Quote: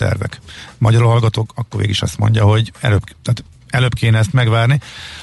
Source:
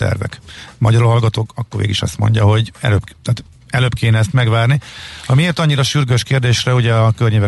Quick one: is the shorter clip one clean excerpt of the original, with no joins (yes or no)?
yes